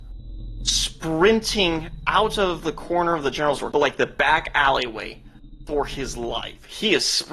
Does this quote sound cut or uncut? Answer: cut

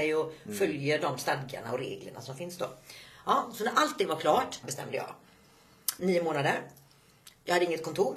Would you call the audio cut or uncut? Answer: cut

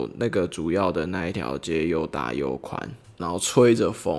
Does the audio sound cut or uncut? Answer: cut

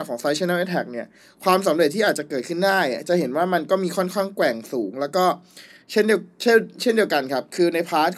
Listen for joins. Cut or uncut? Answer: uncut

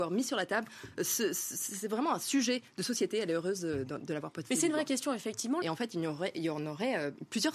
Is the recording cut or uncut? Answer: cut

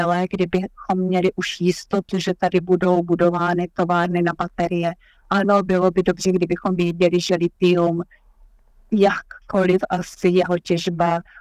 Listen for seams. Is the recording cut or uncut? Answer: uncut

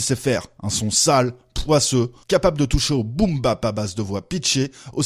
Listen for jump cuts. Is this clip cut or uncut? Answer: cut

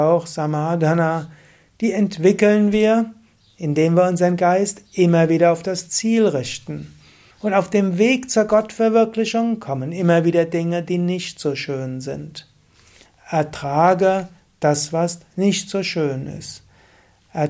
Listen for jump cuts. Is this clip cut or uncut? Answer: cut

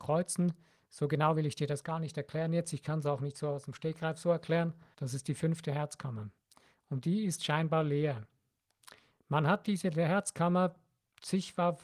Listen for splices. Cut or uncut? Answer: cut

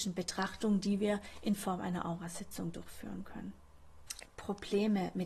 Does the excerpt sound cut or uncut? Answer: cut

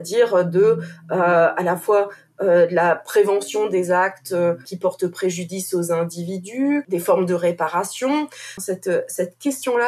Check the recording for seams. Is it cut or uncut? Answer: cut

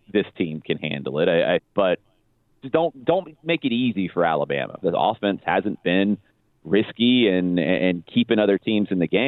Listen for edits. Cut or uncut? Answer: cut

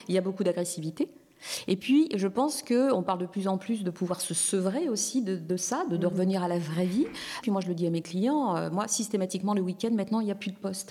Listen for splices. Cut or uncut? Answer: cut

